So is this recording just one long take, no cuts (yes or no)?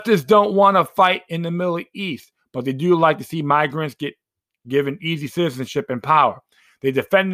yes